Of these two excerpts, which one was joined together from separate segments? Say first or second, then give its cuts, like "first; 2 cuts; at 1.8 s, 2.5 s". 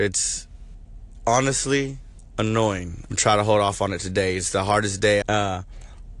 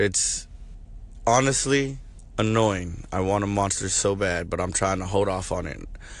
first; 2 cuts; at 3.1 s, 5.2 s